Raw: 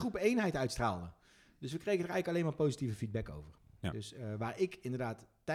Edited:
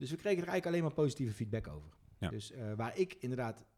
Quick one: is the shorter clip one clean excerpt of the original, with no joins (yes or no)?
yes